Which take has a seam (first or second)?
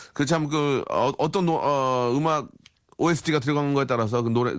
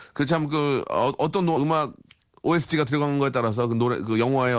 second